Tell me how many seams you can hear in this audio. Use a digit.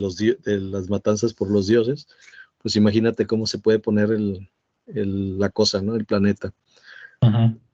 0